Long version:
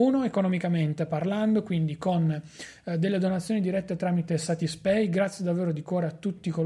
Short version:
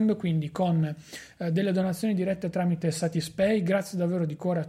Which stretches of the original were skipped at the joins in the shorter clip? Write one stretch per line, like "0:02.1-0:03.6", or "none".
none